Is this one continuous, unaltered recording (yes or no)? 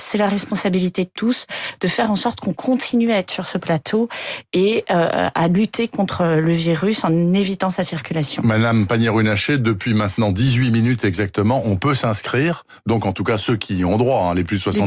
yes